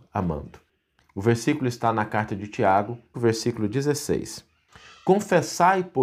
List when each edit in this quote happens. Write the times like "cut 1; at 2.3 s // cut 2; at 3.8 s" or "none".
cut 1; at 1.0 s // cut 2; at 3.1 s